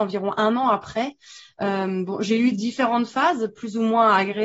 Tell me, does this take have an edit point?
no; 0 cuts

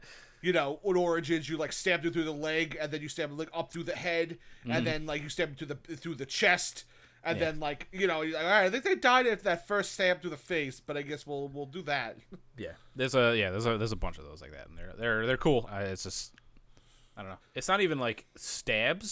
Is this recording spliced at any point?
yes; 2 cuts; at 15.6 s, 17.4 s

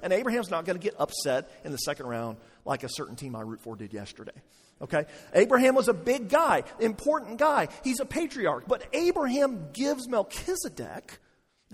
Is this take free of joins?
yes; 0 cuts

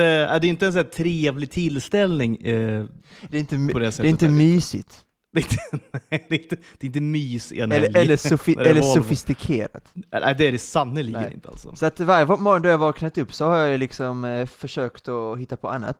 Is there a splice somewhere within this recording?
no; 0 cuts

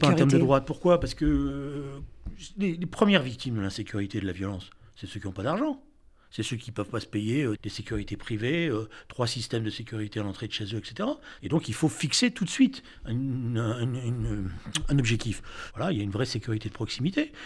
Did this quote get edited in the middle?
yes; 3 cuts; at 7.6 s, 11.4 s, 15.7 s

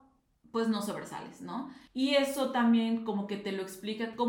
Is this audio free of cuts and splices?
no; 1 cut; at 1.9 s

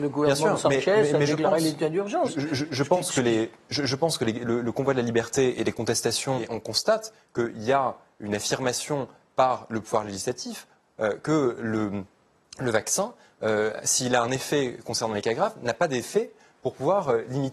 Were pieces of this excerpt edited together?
yes; 1 cut; at 6.4 s

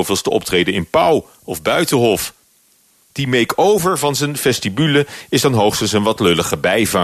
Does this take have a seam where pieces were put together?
no; 0 cuts

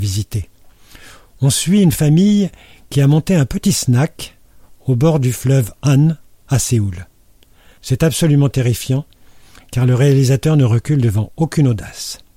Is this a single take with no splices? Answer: no; 1 cut; at 7.8 s

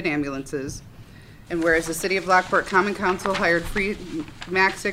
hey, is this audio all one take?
no; 1 cut; at 1.5 s

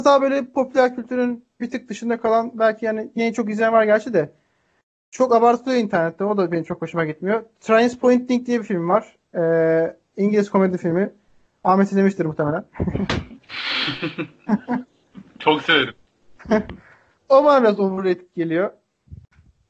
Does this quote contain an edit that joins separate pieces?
no; 0 cuts

